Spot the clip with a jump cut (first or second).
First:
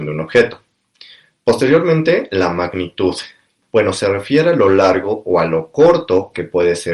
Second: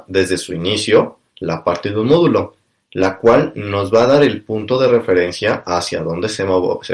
first